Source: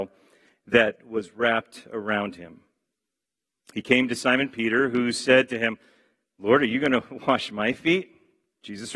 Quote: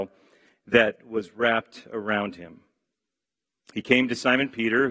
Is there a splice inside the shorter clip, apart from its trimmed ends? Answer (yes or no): no